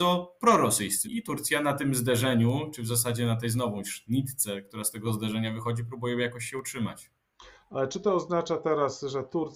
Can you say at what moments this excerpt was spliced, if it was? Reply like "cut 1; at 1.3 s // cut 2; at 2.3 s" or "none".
cut 1; at 1.0 s